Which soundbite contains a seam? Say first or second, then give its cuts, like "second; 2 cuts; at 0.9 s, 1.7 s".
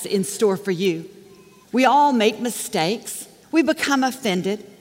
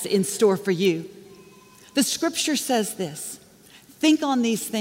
first; 2 cuts; at 1.6 s, 3.4 s